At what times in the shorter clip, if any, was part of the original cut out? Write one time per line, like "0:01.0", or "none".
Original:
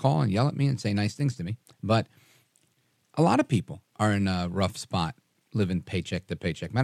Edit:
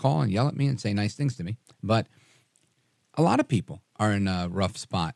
none